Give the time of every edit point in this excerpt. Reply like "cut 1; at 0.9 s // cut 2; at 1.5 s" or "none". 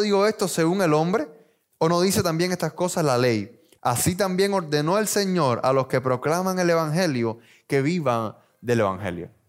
cut 1; at 3.8 s